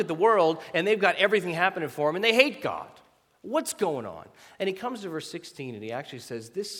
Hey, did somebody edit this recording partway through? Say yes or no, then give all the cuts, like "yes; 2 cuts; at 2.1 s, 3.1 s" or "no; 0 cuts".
no; 0 cuts